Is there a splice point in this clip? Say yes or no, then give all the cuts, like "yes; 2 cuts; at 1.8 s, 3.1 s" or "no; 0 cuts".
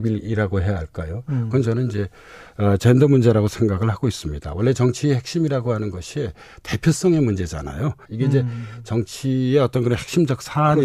yes; 1 cut; at 8.1 s